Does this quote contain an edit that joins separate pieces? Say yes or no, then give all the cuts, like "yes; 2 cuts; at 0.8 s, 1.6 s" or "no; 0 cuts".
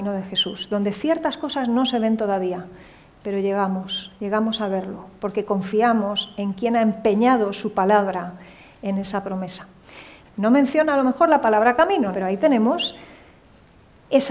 yes; 2 cuts; at 10.2 s, 12.1 s